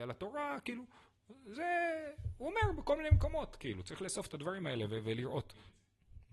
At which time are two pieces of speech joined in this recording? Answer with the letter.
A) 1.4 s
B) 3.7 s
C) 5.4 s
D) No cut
D